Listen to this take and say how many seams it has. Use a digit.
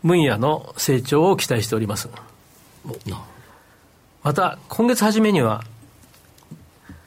1